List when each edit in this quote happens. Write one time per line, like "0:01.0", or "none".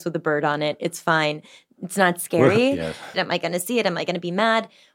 0:03.1